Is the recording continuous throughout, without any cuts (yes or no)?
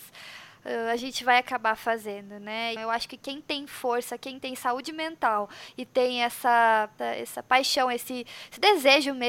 no